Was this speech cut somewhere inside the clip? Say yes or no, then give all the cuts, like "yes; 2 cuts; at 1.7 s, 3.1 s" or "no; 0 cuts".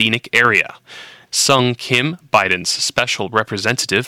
yes; 1 cut; at 1.3 s